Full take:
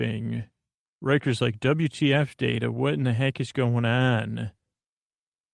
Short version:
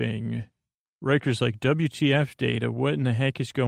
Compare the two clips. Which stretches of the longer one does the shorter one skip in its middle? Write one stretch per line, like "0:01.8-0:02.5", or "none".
none

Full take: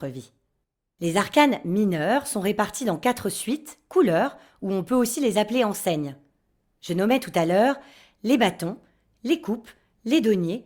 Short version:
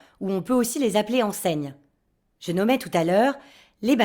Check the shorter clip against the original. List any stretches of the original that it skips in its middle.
none

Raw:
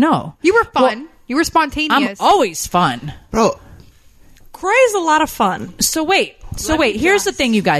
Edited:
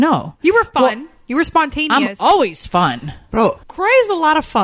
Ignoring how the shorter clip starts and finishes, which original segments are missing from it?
0:03.6-0:04.5

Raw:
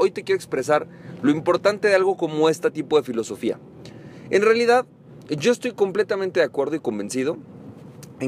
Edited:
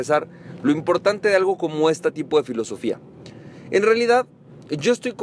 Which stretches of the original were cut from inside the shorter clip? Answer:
none

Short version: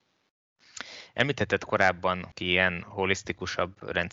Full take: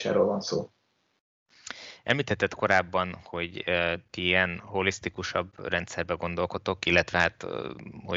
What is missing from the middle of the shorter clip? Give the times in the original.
0:03.2-0:04.1

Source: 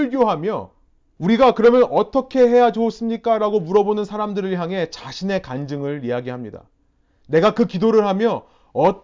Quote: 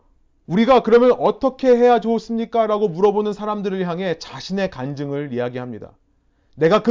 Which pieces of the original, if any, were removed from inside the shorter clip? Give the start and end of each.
none

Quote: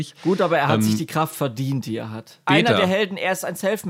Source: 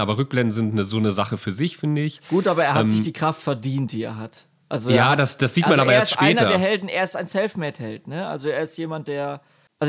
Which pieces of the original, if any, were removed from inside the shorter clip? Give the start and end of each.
0:04.5-0:06.2

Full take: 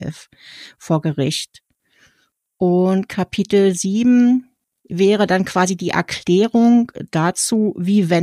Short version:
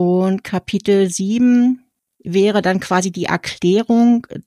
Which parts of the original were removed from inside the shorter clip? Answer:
none

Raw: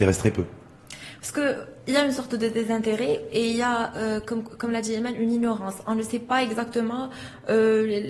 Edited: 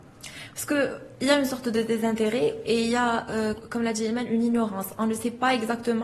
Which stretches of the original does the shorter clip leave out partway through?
0:04.2-0:04.4

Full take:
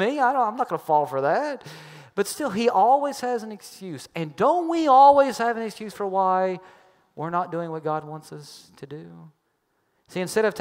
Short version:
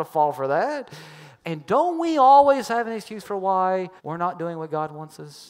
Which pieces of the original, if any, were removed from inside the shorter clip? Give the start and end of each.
0:02.1-0:04.1
0:06.7-0:07.1

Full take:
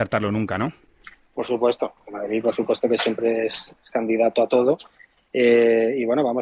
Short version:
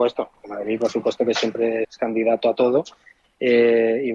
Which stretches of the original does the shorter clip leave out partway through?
0:03.5-0:03.8

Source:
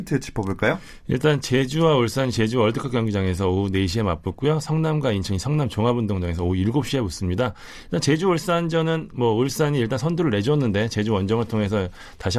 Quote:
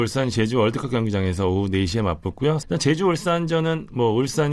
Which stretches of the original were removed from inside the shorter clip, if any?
0:04.6-0:07.8

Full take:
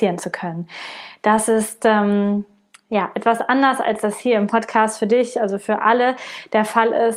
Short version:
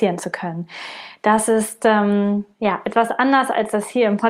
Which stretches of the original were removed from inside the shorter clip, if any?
0:02.5-0:02.8

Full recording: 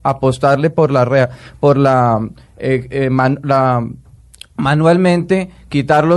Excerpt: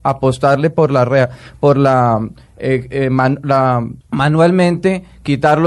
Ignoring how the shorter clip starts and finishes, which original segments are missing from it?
0:04.0-0:04.5

